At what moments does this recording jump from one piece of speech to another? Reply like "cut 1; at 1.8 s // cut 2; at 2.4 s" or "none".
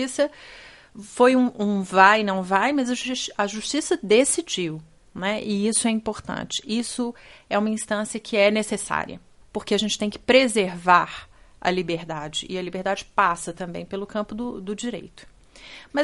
none